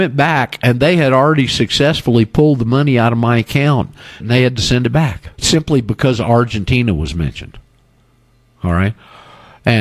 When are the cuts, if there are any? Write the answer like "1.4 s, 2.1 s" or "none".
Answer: 4.2 s, 5.3 s